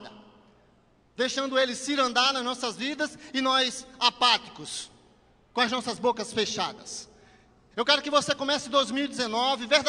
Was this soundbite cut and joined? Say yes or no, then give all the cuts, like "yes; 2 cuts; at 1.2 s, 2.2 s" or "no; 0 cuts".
yes; 1 cut; at 7.7 s